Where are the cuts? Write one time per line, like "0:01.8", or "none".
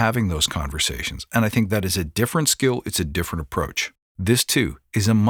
0:04.0